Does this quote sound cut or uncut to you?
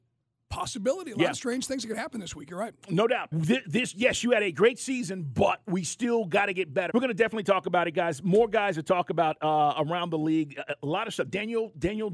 cut